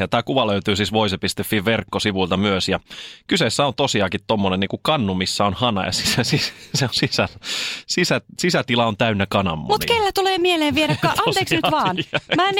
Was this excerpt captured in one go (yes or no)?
yes